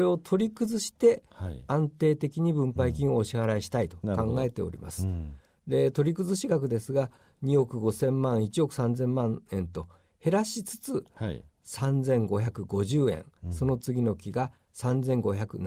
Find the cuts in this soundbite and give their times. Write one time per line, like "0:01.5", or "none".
none